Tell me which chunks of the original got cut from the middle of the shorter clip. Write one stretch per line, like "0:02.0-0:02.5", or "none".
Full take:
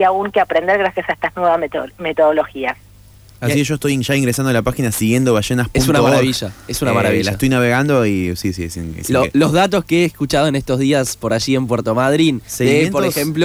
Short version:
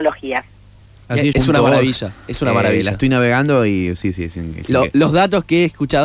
0:03.6-0:05.7